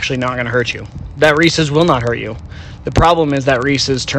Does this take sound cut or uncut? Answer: uncut